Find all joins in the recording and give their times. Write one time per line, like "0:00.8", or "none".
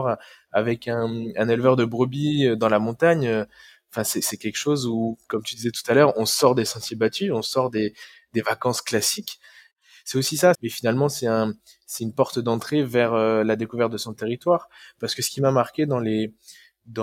0:10.5